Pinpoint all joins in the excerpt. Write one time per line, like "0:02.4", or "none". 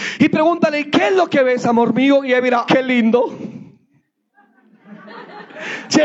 0:02.7

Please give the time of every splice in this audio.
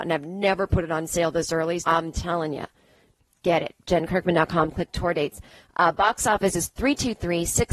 0:01.8

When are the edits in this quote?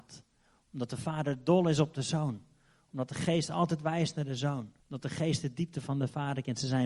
0:04.8

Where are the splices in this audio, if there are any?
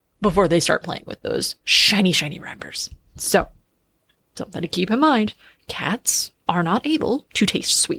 0:06.4

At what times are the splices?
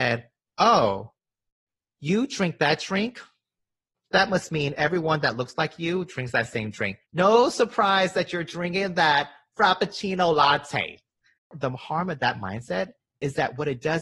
0:07.0
0:11.4

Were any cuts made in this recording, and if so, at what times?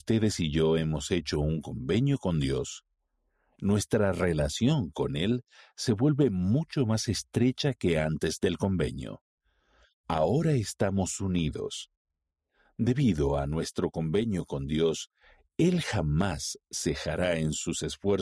none

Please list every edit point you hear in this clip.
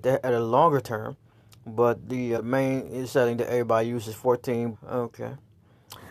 0:02.3
0:04.7

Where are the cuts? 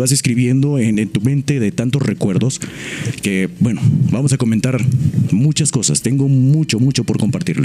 none

